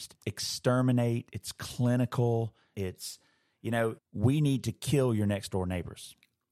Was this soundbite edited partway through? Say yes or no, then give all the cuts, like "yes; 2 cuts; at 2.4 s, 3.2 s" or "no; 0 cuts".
yes; 2 cuts; at 2.7 s, 4.0 s